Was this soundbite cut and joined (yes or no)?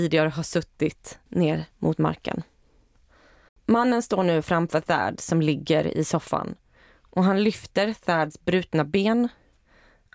yes